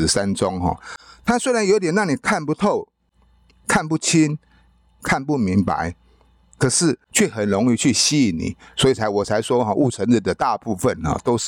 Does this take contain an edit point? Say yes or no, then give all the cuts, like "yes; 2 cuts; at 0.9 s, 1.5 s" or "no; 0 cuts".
no; 0 cuts